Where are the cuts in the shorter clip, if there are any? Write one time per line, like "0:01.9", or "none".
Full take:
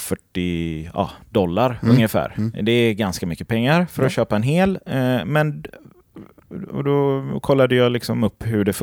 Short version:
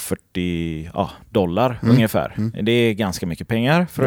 none